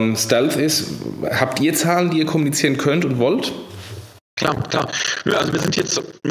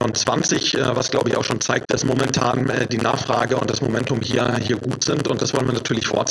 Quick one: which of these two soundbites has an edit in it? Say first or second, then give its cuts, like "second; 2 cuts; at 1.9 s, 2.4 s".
second; 1 cut; at 1.8 s